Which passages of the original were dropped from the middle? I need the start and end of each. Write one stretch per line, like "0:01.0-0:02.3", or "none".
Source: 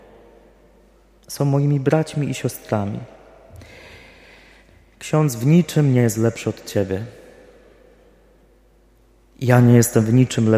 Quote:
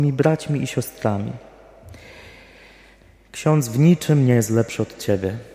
none